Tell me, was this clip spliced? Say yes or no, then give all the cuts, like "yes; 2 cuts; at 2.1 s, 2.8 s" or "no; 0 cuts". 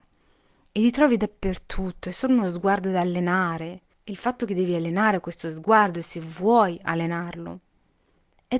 yes; 1 cut; at 3.9 s